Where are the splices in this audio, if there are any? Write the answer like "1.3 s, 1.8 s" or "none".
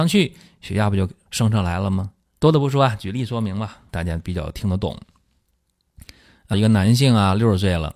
2.2 s, 3.9 s, 6.5 s